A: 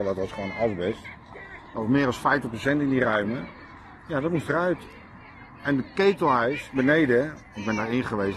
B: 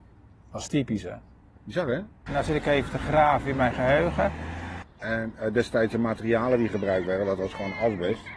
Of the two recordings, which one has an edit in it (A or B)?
B